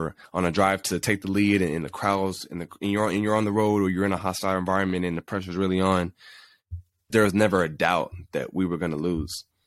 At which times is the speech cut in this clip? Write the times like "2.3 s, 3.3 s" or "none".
7.1 s